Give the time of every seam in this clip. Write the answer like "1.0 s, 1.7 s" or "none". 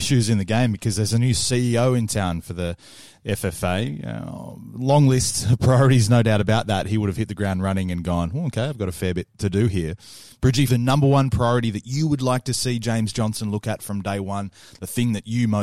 10.7 s